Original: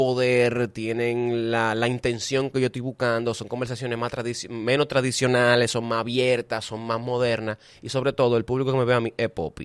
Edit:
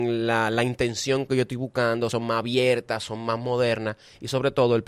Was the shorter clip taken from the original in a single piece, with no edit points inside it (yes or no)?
no